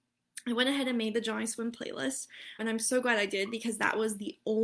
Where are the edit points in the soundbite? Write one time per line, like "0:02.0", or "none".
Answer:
0:02.6